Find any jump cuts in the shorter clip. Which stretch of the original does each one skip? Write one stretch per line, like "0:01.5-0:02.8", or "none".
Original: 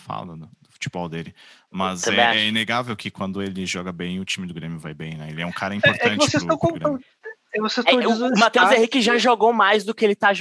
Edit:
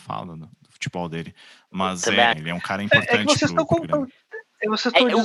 0:02.3-0:05.2